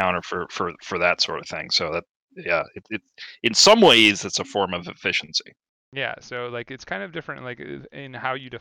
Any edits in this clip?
no; 0 cuts

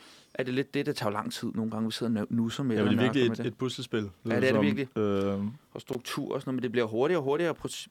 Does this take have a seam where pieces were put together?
no; 0 cuts

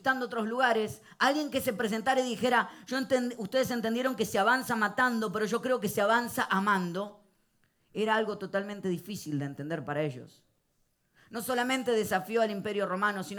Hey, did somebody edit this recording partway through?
no; 0 cuts

